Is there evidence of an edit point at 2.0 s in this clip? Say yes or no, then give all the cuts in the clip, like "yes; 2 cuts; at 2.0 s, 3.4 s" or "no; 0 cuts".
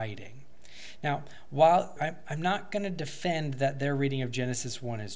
yes; 1 cut; at 2.0 s